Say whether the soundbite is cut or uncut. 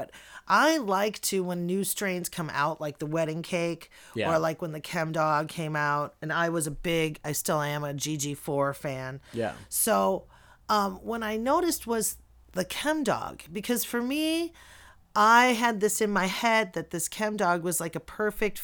uncut